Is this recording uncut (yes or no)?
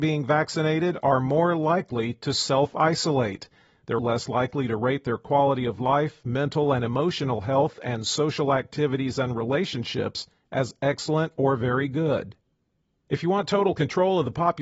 no